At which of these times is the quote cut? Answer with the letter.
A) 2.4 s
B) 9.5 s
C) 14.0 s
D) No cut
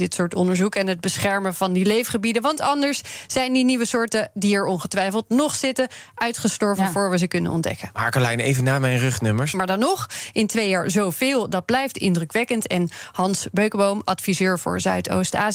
B